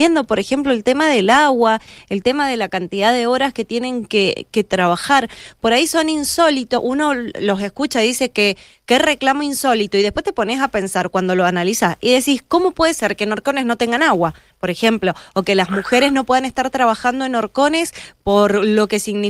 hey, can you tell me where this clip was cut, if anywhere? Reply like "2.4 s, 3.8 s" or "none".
none